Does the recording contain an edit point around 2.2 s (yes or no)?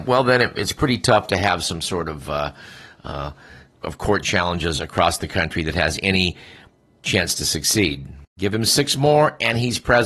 no